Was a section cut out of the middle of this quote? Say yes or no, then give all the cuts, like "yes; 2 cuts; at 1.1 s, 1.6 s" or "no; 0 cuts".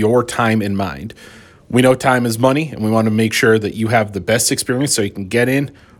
no; 0 cuts